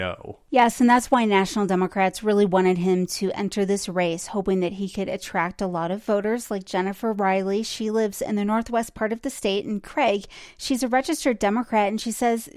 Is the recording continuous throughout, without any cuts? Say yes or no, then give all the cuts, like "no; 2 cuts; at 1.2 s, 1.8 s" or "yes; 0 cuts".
yes; 0 cuts